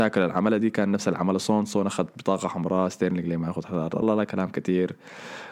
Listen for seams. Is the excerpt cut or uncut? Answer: cut